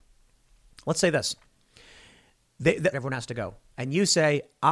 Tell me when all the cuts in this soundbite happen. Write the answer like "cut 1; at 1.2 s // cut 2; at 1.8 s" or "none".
cut 1; at 2.9 s